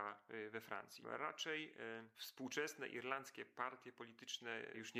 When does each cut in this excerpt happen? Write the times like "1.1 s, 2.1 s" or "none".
none